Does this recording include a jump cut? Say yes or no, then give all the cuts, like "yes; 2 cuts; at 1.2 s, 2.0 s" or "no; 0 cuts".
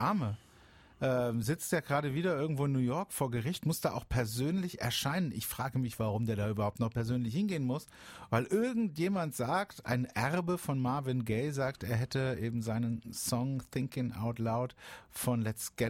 no; 0 cuts